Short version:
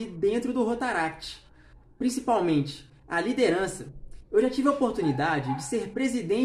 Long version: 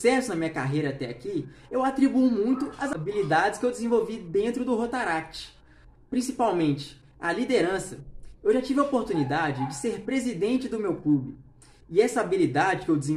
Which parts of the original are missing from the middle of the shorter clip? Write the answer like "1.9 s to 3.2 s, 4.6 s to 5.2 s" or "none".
none